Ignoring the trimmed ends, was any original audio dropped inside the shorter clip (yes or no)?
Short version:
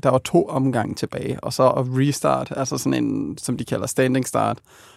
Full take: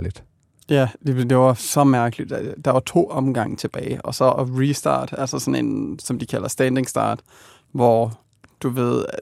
no